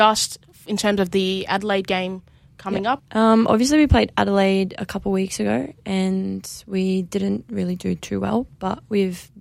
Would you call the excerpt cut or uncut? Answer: cut